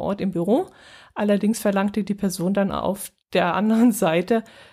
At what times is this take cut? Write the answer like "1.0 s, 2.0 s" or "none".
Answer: 3.2 s

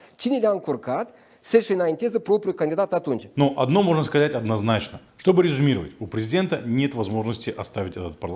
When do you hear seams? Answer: 3.3 s, 5.1 s

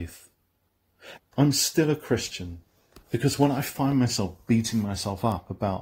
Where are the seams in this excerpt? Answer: 1.2 s, 3.0 s

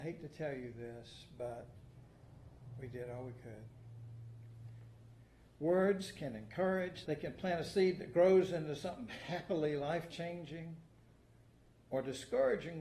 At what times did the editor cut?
7.1 s

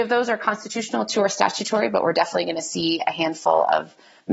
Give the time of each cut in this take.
none

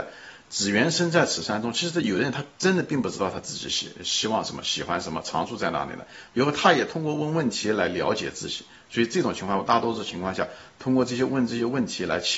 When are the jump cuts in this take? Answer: 6.3 s

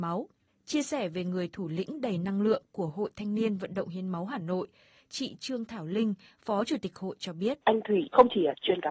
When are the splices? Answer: 7.6 s

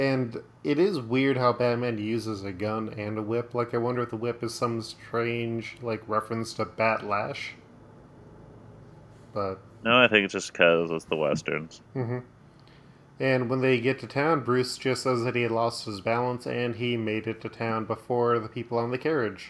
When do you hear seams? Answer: 11.9 s

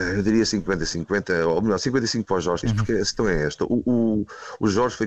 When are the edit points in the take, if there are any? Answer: 2.6 s

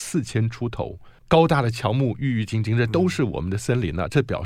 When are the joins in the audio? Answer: 1.2 s

